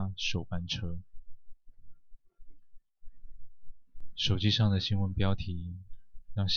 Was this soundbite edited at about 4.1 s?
no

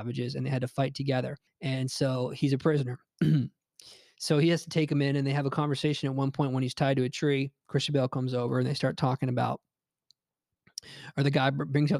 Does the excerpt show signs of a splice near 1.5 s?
yes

